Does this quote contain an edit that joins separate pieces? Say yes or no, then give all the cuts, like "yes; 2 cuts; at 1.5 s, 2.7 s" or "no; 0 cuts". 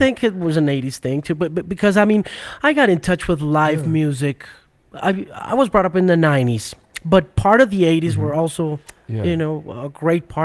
no; 0 cuts